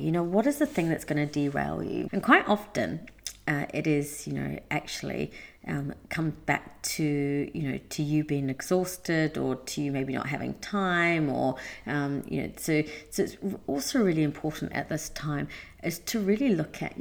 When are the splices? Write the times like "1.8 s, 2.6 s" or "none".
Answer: 2.1 s